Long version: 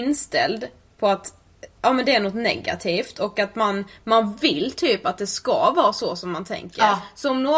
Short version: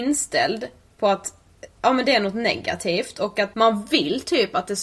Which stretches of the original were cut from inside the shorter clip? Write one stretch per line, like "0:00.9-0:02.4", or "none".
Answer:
0:03.5-0:04.0

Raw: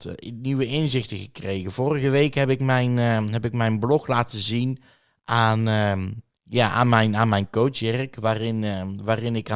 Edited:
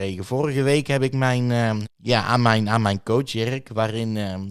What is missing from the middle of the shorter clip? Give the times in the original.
0:03.3-0:06.3

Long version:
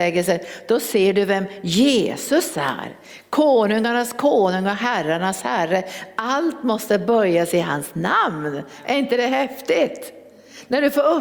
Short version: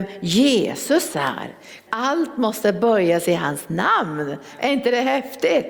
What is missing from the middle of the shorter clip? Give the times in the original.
0:03.3-0:06.1

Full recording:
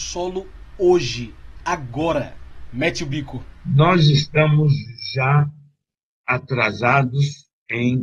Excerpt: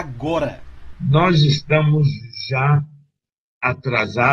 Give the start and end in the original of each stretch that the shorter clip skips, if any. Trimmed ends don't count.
0:02.7-0:03.6

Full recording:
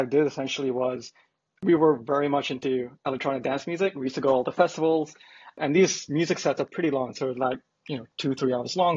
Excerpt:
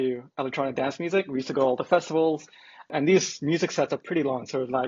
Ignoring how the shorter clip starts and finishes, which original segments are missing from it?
none

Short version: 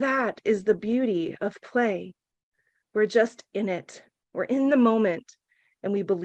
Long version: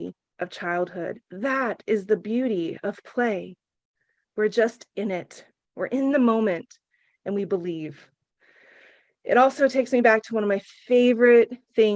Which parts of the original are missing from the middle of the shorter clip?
none

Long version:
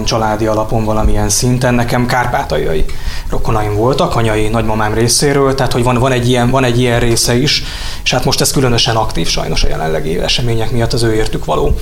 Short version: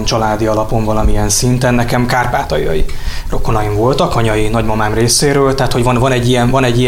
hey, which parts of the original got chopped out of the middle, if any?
none

